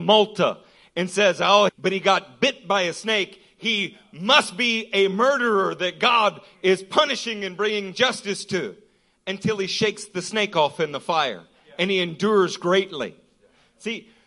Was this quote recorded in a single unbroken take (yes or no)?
no